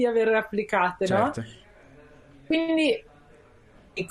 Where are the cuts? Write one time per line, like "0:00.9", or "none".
none